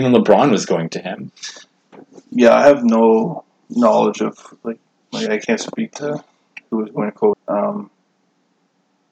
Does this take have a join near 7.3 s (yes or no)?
yes